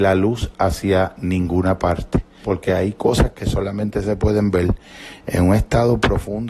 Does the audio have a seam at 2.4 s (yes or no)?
yes